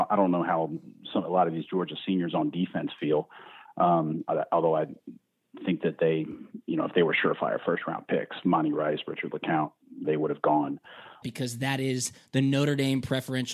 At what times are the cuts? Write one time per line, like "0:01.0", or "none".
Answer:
0:10.0
0:11.2